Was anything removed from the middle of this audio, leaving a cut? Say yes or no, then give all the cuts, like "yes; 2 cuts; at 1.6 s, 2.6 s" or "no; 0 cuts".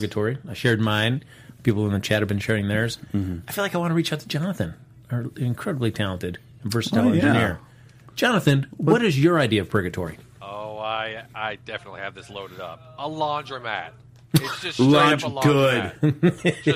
no; 0 cuts